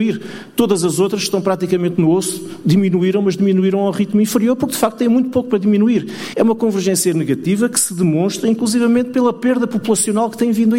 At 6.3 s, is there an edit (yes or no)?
yes